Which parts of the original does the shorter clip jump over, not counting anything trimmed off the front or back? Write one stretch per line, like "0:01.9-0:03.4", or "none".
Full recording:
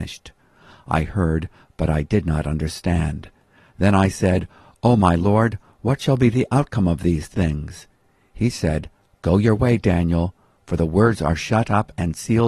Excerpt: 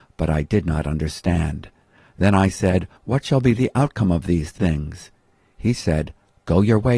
0:04.6-0:05.7